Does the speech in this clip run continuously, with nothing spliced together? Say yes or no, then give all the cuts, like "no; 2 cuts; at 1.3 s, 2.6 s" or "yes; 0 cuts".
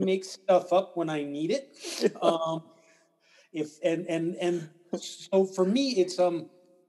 yes; 0 cuts